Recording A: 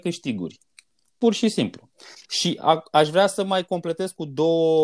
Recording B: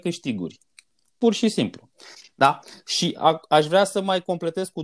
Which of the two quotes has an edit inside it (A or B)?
A